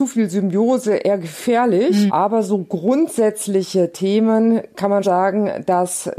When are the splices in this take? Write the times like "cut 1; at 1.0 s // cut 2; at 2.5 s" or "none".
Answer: cut 1; at 2.1 s // cut 2; at 5.0 s